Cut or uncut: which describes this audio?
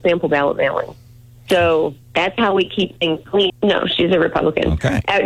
cut